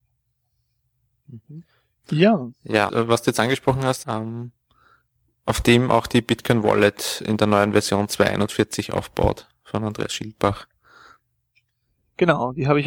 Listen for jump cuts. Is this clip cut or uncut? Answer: cut